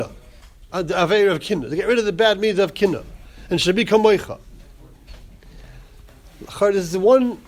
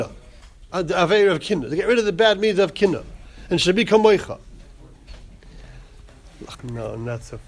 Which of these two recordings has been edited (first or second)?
second